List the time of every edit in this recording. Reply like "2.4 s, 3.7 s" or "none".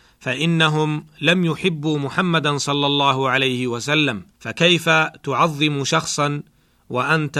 4.3 s